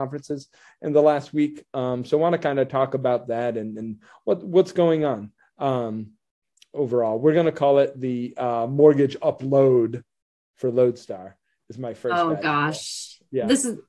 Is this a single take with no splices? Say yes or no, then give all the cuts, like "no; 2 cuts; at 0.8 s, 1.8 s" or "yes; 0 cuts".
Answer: yes; 0 cuts